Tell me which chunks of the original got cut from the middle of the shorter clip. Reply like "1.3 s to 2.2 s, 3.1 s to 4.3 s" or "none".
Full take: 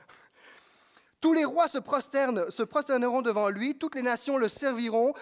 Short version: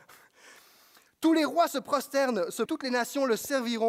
2.7 s to 3.8 s